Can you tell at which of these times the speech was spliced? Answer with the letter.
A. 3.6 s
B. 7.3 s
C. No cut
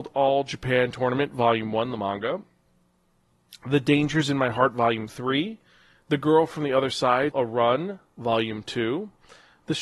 B